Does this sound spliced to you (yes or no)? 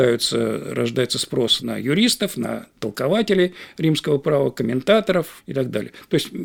no